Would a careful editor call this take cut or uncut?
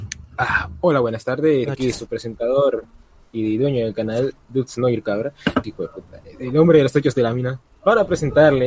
cut